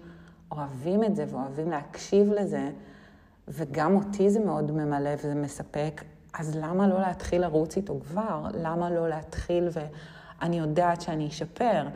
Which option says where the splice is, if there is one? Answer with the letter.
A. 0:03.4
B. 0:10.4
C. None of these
B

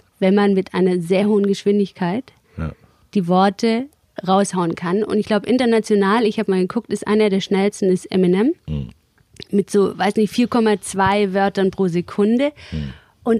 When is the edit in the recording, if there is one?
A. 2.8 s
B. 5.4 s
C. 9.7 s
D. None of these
D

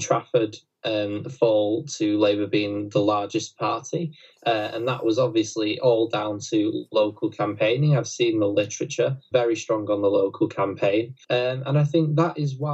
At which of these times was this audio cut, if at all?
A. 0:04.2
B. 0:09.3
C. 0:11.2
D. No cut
B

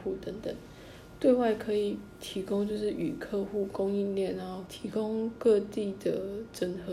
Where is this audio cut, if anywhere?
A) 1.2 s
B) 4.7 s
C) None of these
B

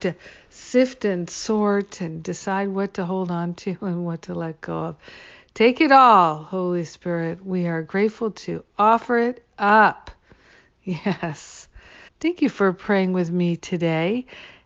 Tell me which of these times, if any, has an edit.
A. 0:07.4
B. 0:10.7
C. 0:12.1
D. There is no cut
C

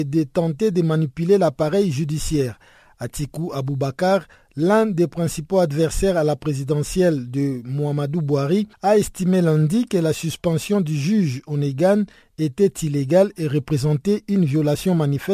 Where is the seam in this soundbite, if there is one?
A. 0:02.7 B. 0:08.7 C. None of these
B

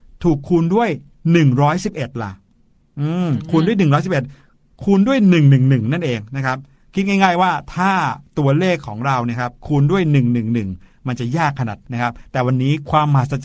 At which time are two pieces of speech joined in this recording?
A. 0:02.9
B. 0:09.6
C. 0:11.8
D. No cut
C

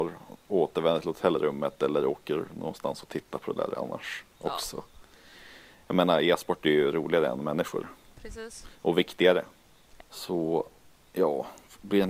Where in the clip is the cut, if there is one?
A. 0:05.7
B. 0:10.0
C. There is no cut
B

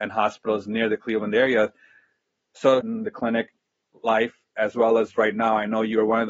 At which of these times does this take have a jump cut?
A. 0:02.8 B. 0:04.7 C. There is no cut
A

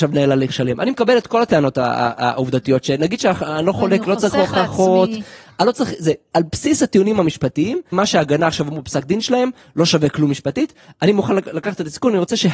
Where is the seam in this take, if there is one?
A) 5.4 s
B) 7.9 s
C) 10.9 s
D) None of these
B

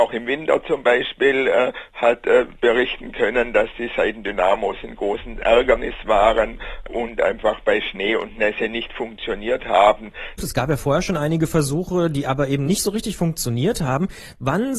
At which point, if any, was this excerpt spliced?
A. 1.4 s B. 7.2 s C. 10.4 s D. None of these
C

